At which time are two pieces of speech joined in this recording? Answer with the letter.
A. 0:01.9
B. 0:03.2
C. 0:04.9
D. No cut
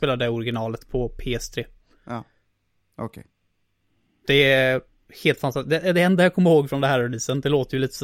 D